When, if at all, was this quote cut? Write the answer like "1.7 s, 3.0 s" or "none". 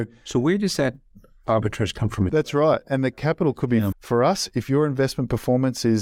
2.3 s, 3.9 s

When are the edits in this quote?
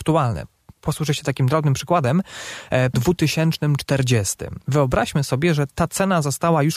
2.9 s

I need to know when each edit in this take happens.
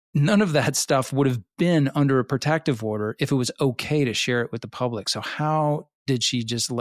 none

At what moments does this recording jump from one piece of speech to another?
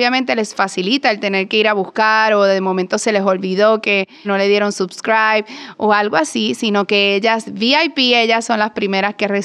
4.2 s

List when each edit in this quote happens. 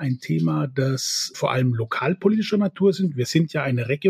1.3 s

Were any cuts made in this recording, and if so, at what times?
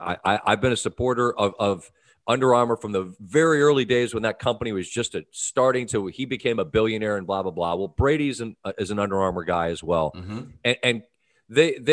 none

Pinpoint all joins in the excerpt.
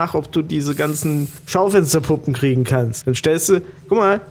3.0 s

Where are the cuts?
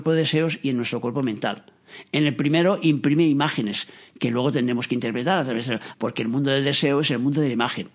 5.9 s

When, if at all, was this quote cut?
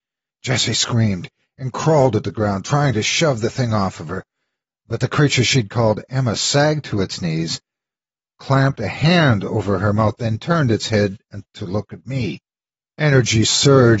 none

